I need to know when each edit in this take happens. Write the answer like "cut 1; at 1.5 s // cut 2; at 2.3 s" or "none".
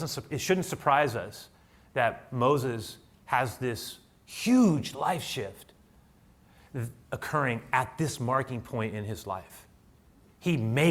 none